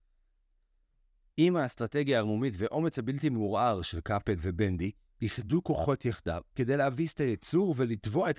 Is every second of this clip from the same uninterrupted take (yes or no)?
yes